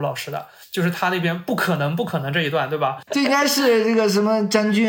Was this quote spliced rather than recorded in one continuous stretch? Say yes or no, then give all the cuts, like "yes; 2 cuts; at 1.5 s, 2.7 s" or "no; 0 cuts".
yes; 1 cut; at 3.1 s